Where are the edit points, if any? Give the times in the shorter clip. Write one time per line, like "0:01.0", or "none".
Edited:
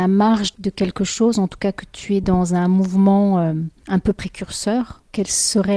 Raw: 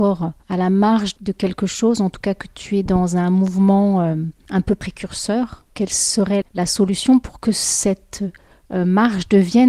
none